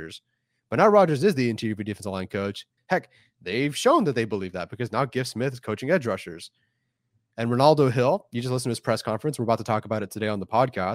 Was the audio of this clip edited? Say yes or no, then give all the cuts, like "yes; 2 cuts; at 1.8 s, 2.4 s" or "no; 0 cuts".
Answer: yes; 1 cut; at 2.8 s